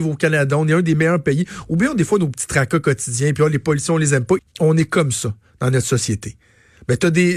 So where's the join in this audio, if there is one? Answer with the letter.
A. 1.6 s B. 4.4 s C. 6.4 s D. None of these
B